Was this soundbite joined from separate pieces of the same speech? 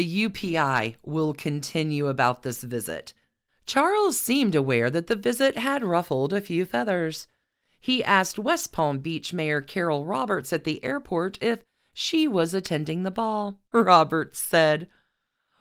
yes; 1 cut; at 13.7 s

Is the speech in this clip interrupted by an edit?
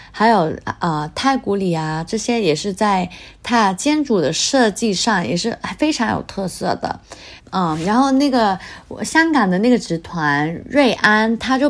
yes; 2 cuts; at 2.1 s, 7.4 s

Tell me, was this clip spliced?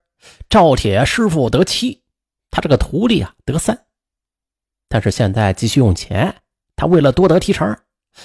no; 0 cuts

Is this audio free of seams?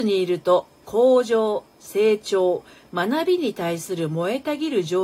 yes; 0 cuts

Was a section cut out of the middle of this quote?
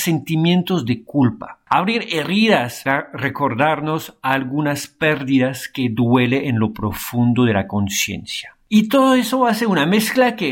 no; 0 cuts

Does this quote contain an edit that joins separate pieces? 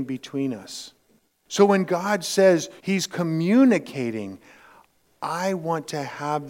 yes; 2 cuts; at 1.3 s, 2.8 s

